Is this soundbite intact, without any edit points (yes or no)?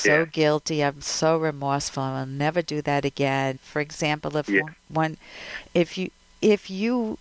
no